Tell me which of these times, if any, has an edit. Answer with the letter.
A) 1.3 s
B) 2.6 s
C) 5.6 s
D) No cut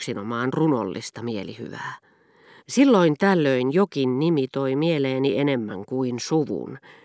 B